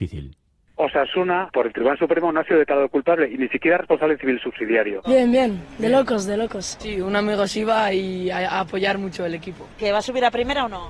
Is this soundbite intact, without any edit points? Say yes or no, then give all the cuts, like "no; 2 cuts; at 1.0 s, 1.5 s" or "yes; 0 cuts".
no; 1 cut; at 5.0 s